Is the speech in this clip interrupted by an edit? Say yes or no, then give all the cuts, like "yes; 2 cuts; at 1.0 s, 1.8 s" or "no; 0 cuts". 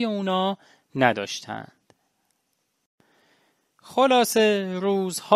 no; 0 cuts